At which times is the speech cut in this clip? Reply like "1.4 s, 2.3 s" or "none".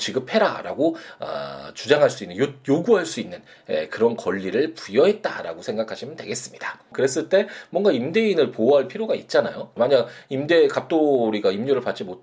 6.9 s, 9.8 s